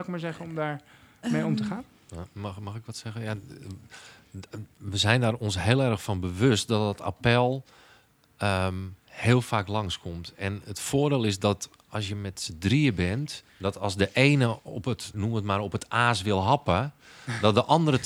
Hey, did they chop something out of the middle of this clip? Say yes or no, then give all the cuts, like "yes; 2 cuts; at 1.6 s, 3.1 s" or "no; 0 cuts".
yes; 2 cuts; at 13.5 s, 15.1 s